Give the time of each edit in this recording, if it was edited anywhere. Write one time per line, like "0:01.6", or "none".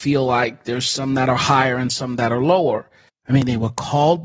0:03.1